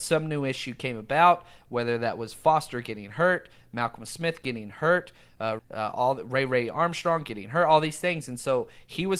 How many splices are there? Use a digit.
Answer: 1